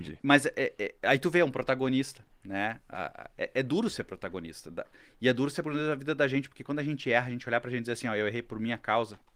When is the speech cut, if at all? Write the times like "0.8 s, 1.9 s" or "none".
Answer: none

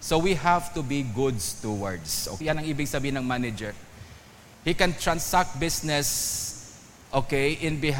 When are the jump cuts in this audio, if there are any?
2.4 s

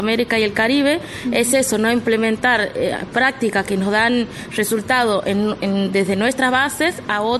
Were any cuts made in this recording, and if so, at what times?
none

